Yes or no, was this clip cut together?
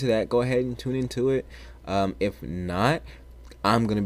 no